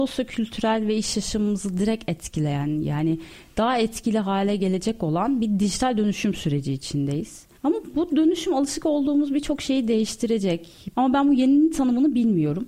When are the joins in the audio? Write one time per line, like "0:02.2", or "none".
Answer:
0:07.6
0:10.9